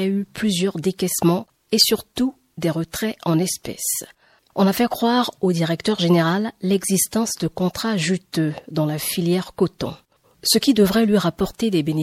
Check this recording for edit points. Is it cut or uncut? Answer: uncut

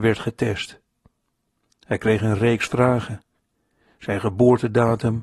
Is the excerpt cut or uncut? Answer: uncut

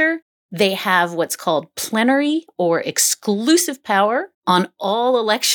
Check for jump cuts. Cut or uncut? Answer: cut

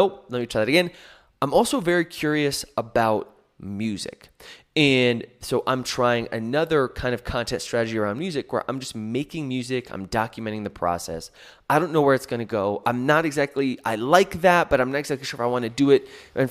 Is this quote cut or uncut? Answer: cut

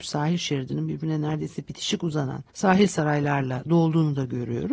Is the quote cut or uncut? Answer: cut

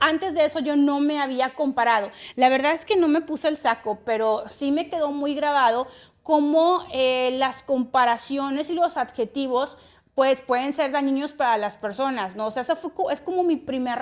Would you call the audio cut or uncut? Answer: uncut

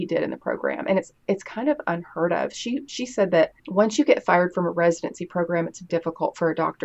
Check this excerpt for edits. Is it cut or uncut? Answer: cut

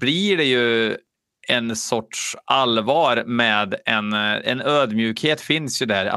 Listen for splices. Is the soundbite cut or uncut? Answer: uncut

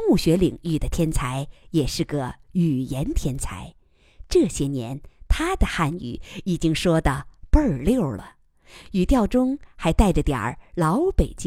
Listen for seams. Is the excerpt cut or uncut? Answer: uncut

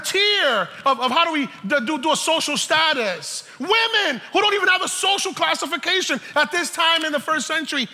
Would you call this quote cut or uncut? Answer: uncut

